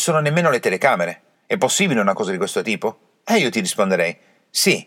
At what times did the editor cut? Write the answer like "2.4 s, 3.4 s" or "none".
1.3 s